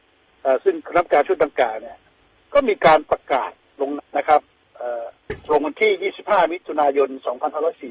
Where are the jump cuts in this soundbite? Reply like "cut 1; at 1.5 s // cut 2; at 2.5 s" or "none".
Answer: cut 1; at 4.0 s // cut 2; at 5.4 s